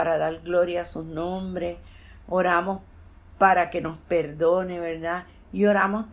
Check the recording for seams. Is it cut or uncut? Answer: uncut